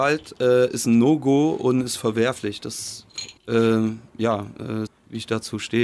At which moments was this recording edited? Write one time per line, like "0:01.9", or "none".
0:03.4
0:04.9